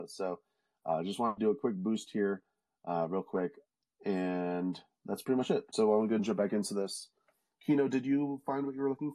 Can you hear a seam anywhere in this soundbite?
no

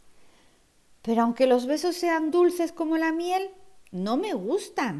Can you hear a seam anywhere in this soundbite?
no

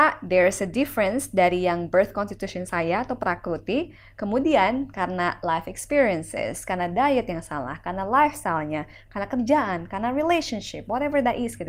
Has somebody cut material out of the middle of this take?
no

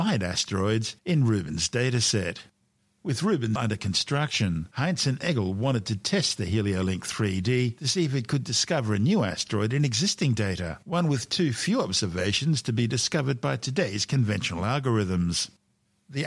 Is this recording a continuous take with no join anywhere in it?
no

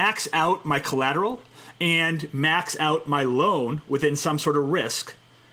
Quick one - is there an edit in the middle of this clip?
no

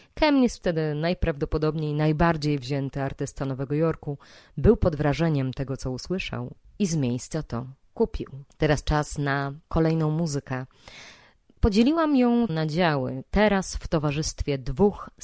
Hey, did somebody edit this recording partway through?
yes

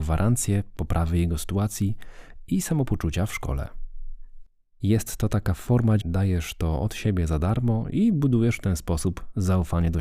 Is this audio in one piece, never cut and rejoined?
no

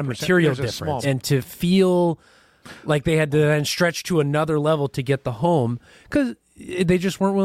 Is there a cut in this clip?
yes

